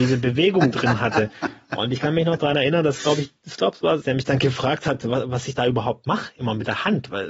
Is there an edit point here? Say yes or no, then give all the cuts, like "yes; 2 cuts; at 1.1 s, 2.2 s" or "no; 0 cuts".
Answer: yes; 1 cut; at 4.0 s